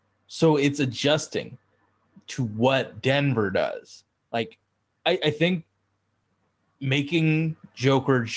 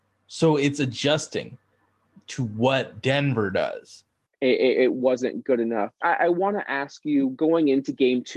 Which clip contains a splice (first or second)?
second